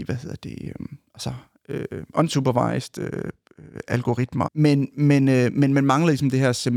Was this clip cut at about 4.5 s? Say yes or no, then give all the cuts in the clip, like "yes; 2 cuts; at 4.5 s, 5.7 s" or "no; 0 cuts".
yes; 1 cut; at 4.5 s